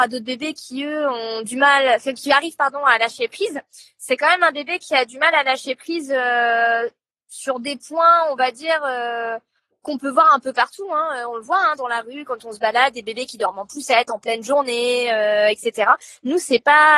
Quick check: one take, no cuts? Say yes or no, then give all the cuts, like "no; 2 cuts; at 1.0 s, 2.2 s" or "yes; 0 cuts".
yes; 0 cuts